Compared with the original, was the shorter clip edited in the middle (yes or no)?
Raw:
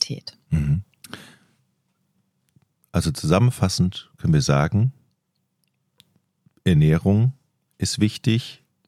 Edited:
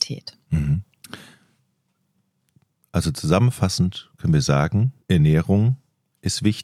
yes